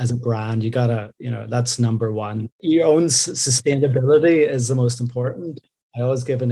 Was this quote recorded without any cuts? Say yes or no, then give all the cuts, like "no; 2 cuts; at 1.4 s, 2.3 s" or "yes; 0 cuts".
yes; 0 cuts